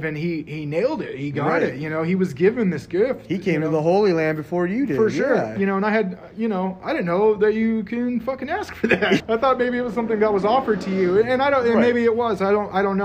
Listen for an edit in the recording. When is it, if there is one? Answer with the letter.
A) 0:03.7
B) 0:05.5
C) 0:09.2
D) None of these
C